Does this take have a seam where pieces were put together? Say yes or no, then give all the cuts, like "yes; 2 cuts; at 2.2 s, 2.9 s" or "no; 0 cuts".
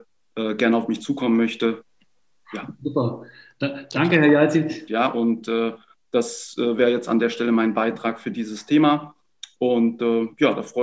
yes; 1 cut; at 4.9 s